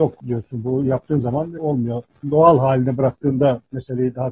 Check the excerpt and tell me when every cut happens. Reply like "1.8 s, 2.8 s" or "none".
2.2 s